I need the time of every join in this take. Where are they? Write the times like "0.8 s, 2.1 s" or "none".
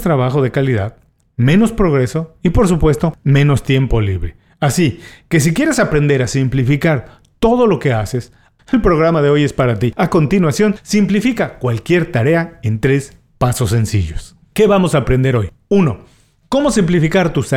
8.6 s